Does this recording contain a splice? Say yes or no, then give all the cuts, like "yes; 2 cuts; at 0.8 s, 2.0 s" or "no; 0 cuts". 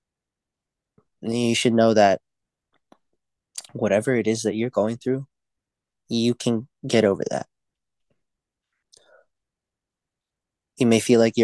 no; 0 cuts